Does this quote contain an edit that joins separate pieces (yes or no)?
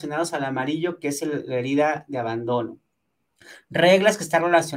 no